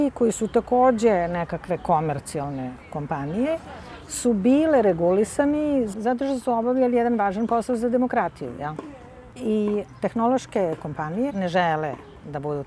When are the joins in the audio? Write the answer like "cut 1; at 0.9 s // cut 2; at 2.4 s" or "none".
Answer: cut 1; at 11.3 s